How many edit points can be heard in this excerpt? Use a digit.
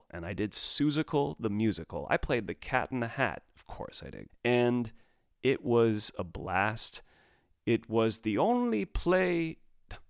1